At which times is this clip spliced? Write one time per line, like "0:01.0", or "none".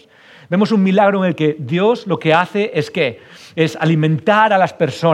none

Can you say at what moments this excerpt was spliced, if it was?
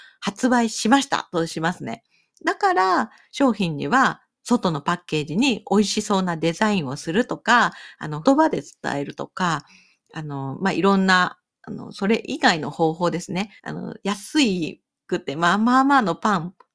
0:02.3
0:08.2
0:13.6

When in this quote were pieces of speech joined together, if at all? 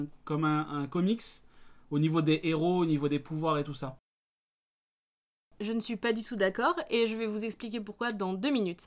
none

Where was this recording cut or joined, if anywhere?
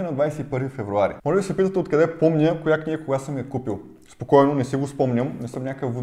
none

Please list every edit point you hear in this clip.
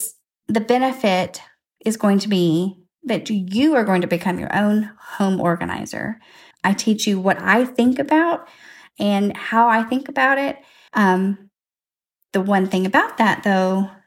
0:06.5
0:10.9

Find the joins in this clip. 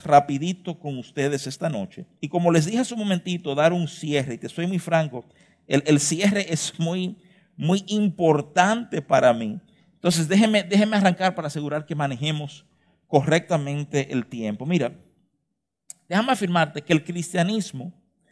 0:02.2

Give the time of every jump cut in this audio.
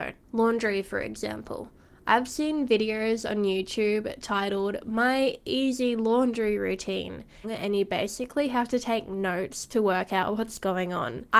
0:07.4

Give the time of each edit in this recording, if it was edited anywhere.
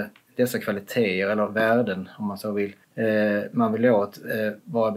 0:02.8

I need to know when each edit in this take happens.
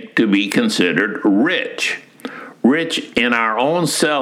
none

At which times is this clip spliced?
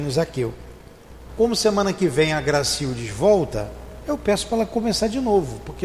0:01.3

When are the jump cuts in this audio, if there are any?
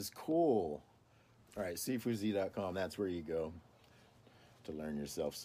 0:01.4

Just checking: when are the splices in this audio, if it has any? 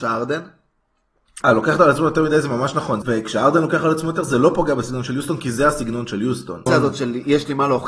0:01.4
0:03.0
0:06.7

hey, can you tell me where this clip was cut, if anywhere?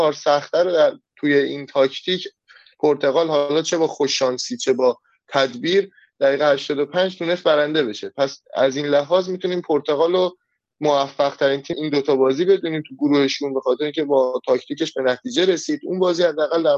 0:08.4
0:11.7

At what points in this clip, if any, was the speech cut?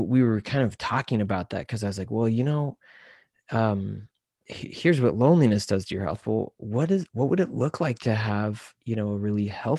none

